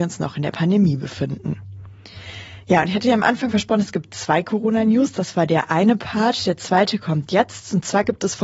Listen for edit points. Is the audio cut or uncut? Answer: uncut